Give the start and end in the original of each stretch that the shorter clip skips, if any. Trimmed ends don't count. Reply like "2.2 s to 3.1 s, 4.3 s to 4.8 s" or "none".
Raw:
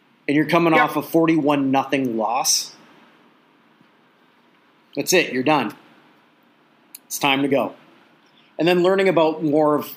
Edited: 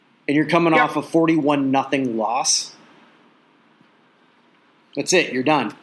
none